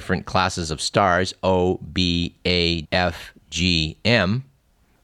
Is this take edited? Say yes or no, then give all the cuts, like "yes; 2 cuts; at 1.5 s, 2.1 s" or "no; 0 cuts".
yes; 1 cut; at 2.8 s